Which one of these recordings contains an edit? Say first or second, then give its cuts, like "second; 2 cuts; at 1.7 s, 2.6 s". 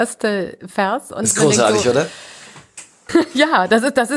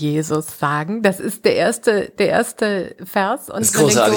first; 1 cut; at 3.1 s